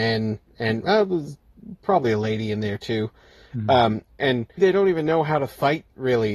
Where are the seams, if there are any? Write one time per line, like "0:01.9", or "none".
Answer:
0:04.6